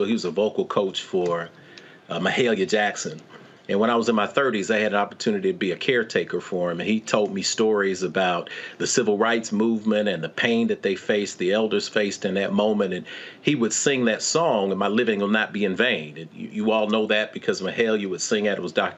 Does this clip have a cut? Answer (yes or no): no